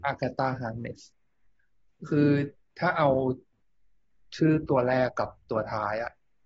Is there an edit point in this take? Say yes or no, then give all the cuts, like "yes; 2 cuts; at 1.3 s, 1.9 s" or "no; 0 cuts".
no; 0 cuts